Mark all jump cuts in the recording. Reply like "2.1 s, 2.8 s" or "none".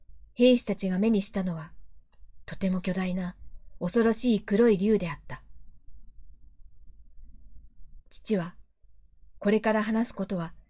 8.0 s